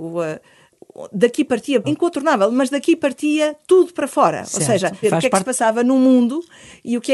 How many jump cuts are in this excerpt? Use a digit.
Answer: 2